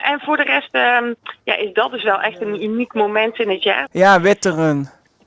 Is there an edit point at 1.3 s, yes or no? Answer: no